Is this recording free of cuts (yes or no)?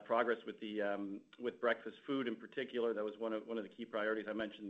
yes